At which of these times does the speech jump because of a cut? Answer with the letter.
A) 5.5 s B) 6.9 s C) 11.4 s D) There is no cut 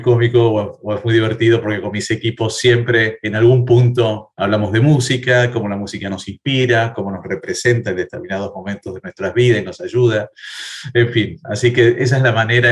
B